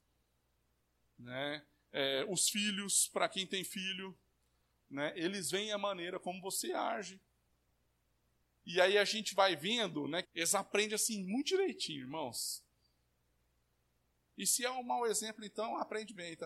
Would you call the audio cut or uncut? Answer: cut